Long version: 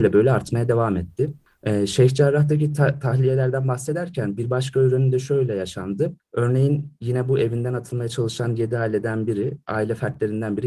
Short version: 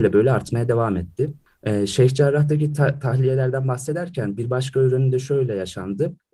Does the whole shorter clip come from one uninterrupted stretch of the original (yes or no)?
yes